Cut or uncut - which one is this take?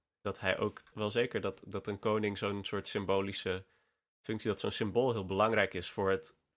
cut